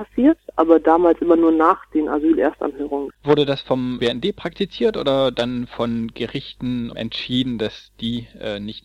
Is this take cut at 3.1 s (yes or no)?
yes